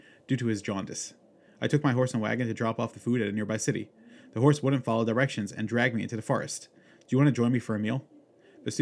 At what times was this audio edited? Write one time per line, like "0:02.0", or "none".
none